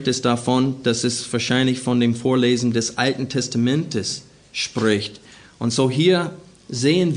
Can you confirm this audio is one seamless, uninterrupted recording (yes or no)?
yes